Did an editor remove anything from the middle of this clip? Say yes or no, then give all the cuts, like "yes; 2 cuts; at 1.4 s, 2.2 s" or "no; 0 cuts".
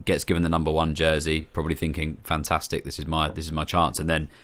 no; 0 cuts